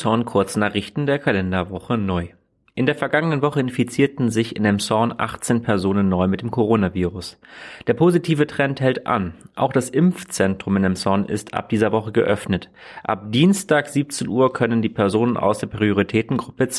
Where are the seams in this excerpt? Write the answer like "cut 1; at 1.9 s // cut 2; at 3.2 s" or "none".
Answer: none